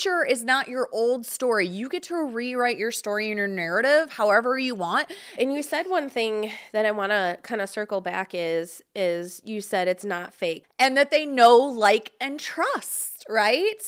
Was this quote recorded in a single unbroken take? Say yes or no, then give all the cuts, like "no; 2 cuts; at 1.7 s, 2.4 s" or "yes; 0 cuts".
no; 2 cuts; at 5.4 s, 10.6 s